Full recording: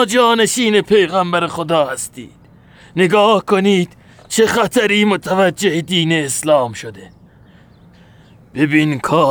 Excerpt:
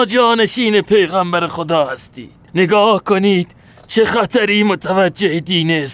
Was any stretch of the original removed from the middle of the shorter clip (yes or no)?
yes